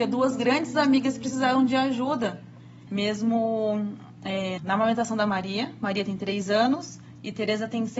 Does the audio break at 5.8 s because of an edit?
no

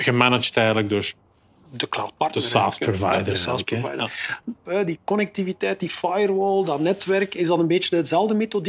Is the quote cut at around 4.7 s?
yes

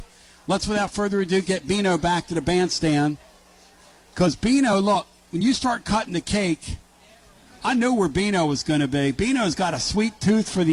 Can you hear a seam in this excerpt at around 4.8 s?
no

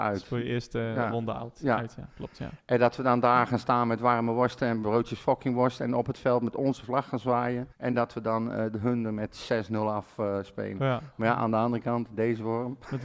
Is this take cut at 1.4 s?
no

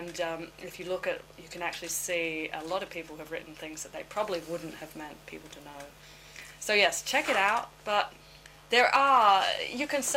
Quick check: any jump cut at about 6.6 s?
no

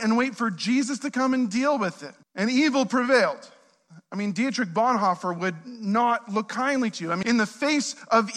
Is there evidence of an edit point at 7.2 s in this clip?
yes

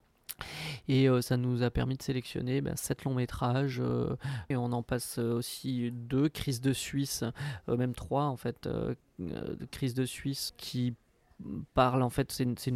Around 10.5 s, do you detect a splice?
yes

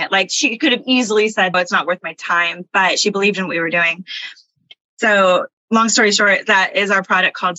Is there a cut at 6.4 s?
no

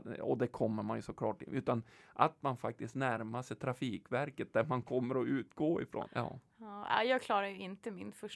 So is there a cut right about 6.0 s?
yes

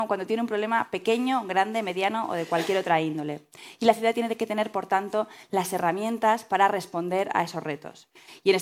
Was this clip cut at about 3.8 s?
no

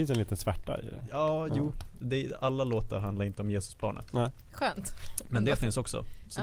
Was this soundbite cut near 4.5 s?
no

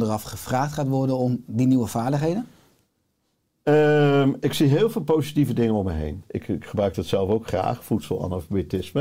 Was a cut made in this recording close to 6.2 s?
yes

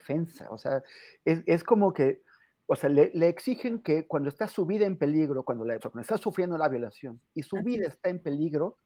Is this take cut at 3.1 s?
yes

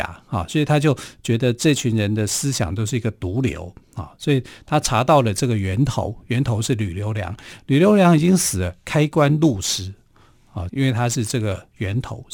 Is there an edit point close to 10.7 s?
yes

